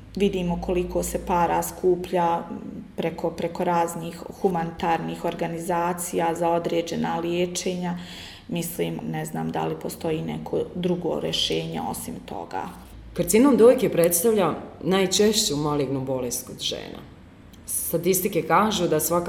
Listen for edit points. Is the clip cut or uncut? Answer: uncut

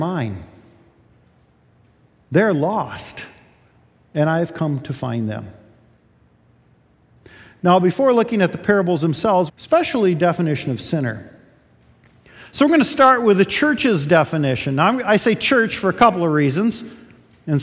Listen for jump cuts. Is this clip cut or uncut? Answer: cut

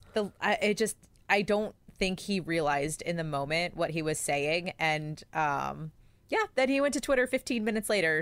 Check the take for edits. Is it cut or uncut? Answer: uncut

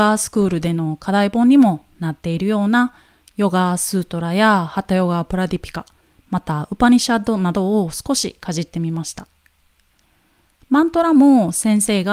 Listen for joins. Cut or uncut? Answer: uncut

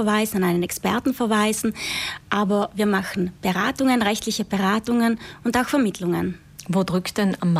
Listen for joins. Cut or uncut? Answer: uncut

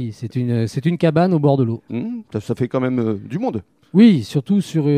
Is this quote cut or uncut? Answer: cut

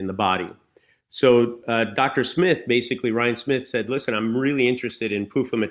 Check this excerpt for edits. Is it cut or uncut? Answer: uncut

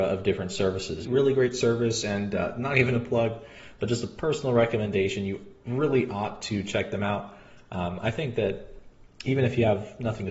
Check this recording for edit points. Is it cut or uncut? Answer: cut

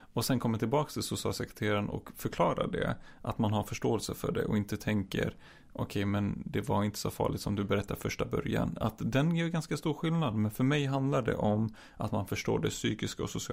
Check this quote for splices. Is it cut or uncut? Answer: uncut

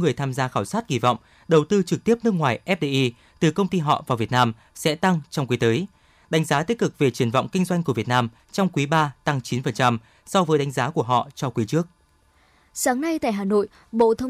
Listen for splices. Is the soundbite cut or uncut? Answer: uncut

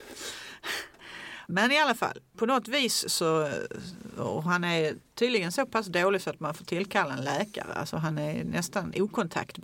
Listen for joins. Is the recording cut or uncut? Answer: uncut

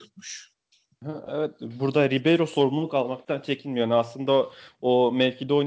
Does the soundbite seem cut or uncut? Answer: uncut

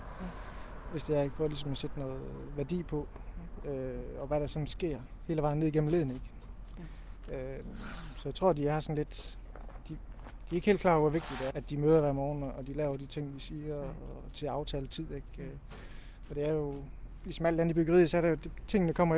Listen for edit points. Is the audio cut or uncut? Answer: cut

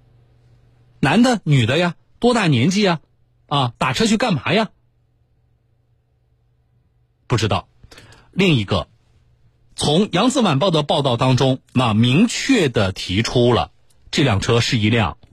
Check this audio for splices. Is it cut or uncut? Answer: uncut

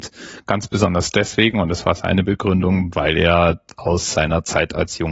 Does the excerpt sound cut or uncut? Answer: uncut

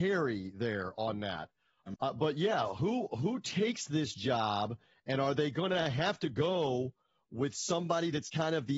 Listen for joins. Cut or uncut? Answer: cut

